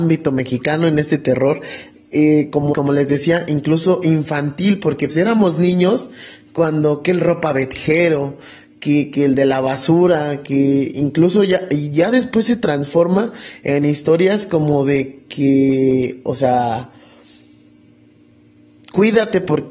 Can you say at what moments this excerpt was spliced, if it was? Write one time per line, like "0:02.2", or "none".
0:02.7
0:05.1